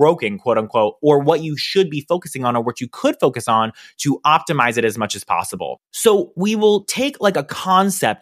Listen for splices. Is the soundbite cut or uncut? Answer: cut